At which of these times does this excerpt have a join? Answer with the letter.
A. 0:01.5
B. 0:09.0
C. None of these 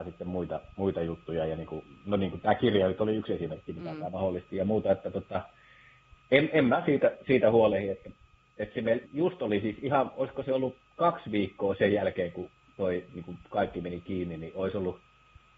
B